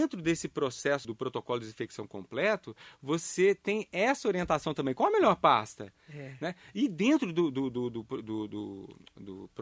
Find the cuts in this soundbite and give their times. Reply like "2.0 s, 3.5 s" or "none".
1.0 s